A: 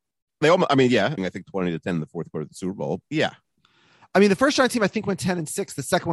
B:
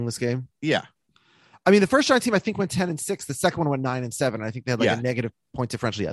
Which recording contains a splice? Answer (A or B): A